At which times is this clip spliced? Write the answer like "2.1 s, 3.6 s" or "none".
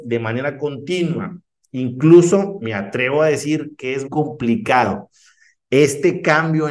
4.1 s

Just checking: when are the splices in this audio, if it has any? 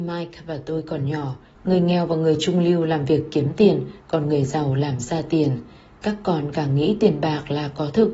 1.6 s

